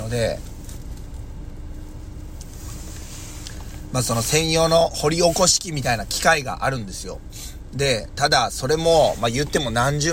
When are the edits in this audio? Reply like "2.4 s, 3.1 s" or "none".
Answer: none